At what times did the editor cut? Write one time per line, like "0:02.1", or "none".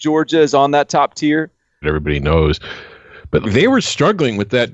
0:01.8
0:03.4